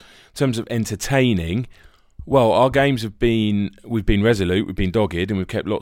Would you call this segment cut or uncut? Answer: uncut